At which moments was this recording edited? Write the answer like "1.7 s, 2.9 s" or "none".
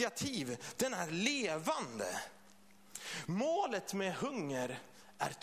none